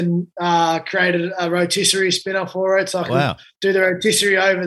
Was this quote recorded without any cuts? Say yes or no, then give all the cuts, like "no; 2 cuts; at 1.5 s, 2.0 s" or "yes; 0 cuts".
yes; 0 cuts